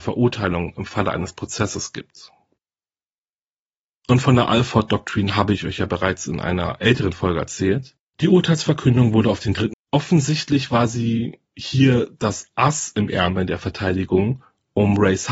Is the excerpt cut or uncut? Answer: cut